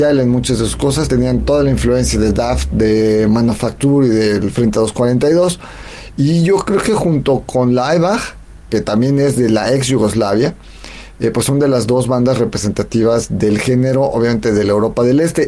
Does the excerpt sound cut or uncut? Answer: uncut